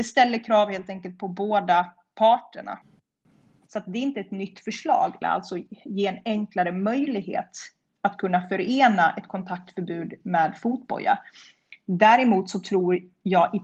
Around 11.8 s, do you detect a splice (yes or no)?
no